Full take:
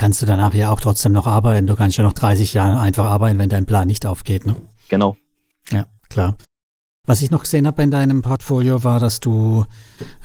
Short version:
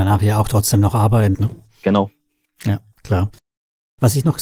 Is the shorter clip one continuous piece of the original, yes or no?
no